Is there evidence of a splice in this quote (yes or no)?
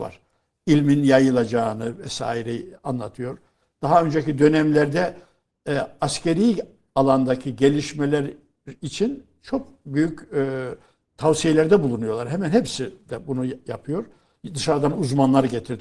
no